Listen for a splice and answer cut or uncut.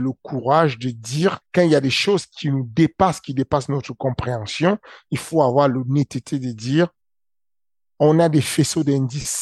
cut